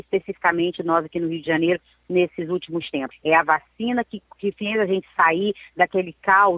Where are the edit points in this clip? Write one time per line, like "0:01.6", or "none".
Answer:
0:03.1